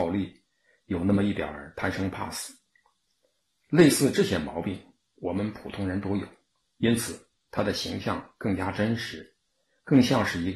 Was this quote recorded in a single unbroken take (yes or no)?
yes